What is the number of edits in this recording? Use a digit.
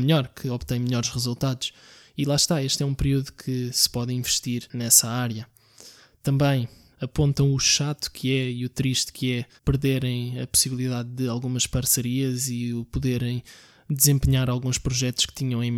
2